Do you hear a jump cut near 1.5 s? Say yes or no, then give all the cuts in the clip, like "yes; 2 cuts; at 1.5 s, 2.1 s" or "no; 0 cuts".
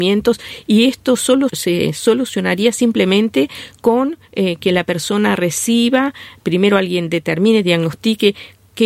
yes; 1 cut; at 1.5 s